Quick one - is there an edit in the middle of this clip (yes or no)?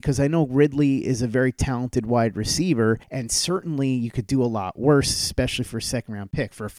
yes